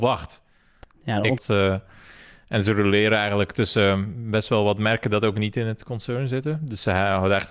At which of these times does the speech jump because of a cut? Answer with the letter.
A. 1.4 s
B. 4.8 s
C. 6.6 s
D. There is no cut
A